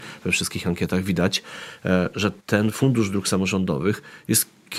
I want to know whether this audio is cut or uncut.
cut